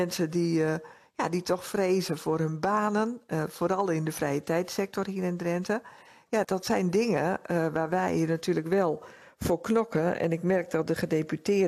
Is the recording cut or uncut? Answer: cut